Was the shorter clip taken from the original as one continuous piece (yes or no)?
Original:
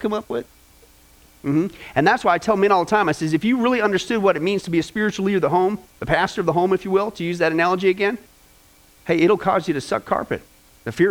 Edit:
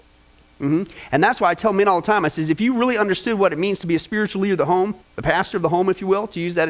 yes